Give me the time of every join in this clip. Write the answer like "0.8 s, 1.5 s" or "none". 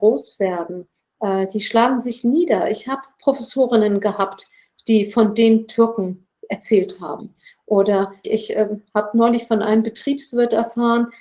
8.2 s